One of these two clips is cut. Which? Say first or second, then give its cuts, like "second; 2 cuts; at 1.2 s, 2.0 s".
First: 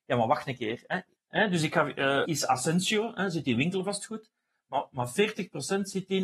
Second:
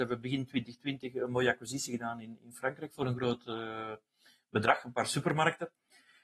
first; 2 cuts; at 1.2 s, 2.3 s